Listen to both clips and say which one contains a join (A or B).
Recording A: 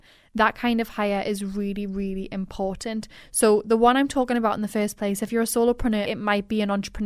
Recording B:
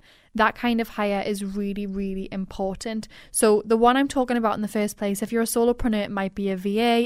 A